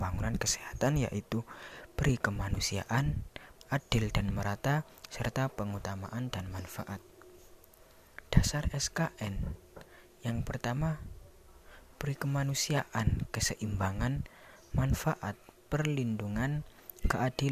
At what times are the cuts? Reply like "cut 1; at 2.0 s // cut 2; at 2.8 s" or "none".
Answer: cut 1; at 3.6 s